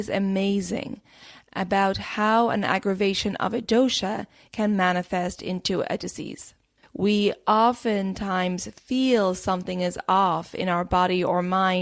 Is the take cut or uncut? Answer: cut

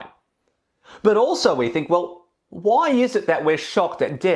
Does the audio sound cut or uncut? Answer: uncut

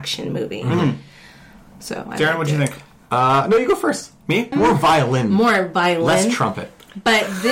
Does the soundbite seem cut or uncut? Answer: cut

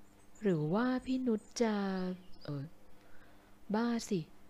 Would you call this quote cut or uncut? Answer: cut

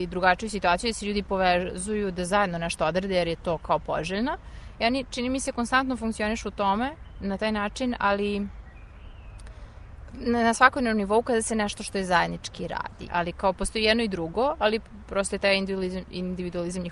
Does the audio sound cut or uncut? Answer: cut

